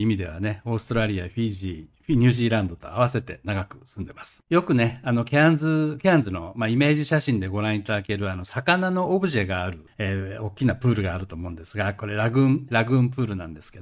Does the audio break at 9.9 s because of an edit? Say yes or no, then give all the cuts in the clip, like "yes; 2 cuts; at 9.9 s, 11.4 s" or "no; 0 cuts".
no; 2 cuts; at 4.4 s, 12.7 s